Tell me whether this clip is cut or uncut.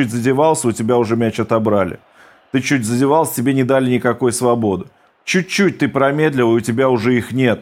cut